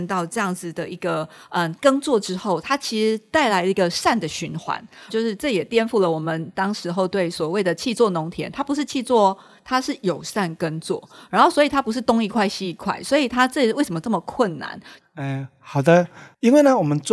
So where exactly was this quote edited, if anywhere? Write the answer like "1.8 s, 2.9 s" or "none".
5.1 s, 15.0 s